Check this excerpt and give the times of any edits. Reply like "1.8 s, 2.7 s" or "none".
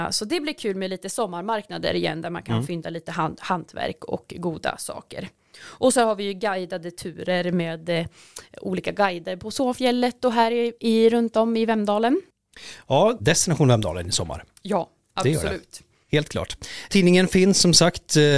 13.2 s